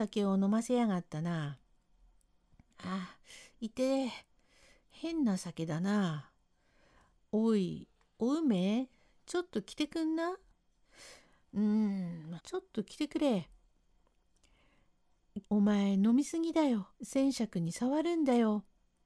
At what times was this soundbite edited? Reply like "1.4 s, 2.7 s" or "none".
12.4 s, 15.4 s, 16.9 s